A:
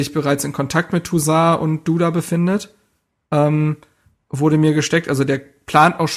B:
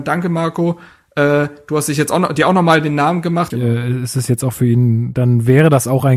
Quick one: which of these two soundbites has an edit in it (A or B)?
B